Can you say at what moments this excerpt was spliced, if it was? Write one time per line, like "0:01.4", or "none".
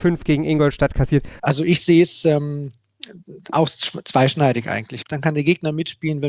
0:01.4
0:05.0

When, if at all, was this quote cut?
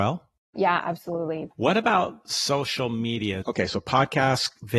0:01.5
0:03.4

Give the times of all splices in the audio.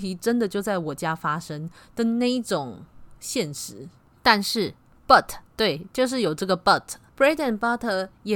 0:05.5

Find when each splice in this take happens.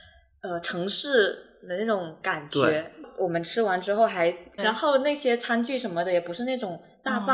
0:04.6

